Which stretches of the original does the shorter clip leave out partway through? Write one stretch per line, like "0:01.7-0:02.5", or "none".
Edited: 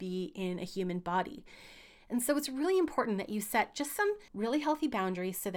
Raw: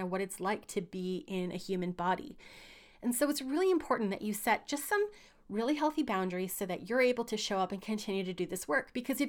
0:05.2-0:05.4